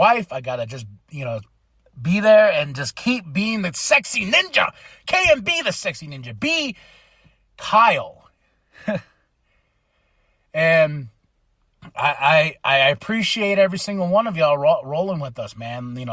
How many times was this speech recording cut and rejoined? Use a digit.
0